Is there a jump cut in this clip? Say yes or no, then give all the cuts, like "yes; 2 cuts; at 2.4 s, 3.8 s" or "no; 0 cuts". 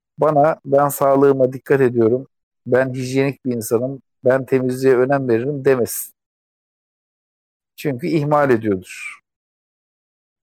no; 0 cuts